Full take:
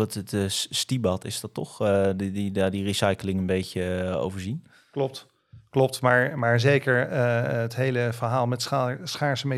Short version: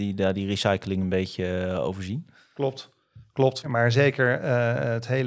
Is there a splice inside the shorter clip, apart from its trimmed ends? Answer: yes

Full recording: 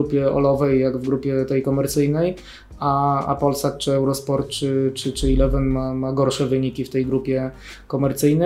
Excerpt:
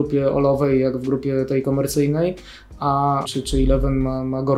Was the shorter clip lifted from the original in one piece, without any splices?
no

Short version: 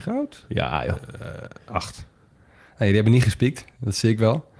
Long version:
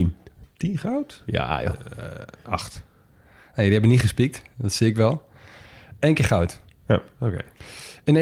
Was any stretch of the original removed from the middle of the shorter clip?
no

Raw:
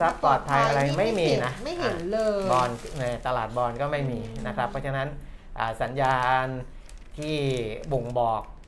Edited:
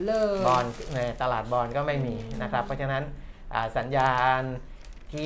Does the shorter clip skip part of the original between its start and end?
no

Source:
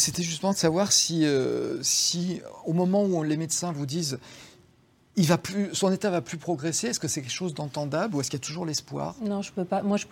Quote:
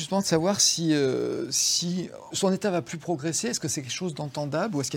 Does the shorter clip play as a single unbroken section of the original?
no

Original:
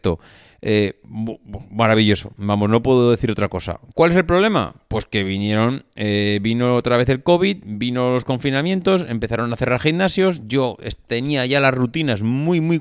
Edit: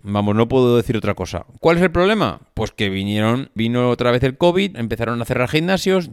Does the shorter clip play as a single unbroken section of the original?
no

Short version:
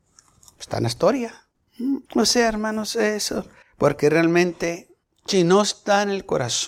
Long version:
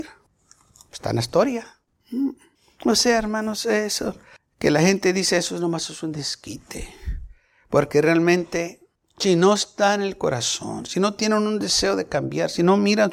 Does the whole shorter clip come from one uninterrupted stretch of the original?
no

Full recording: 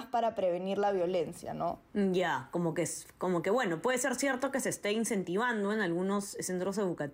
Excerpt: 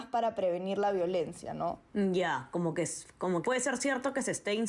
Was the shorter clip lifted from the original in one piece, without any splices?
no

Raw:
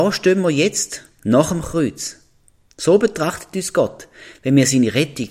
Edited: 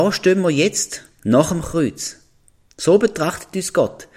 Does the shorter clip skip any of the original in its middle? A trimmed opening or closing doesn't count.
no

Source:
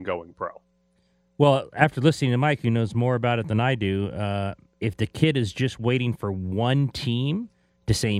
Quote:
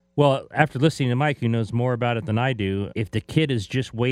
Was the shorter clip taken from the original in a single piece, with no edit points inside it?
no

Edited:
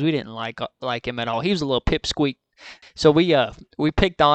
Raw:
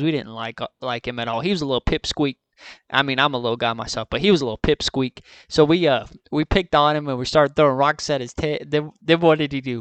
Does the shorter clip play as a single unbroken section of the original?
no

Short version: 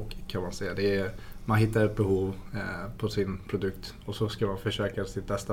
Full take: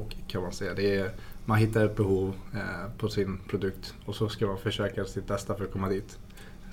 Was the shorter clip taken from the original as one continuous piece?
yes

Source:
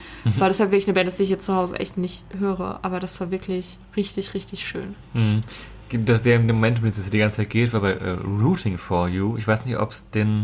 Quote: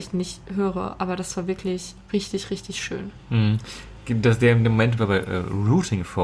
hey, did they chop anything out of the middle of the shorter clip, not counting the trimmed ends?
yes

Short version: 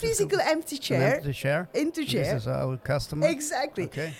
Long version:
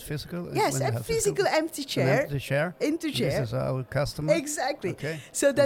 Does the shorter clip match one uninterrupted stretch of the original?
yes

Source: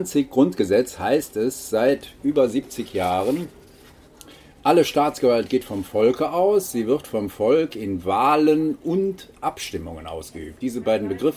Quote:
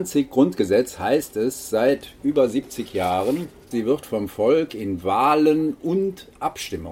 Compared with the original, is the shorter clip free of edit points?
no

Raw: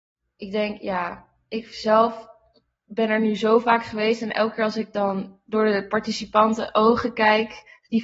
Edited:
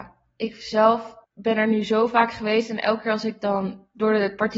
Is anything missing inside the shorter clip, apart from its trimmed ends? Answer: yes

